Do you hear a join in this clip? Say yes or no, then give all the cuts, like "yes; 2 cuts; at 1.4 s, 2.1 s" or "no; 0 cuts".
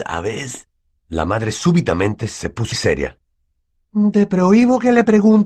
yes; 1 cut; at 2.7 s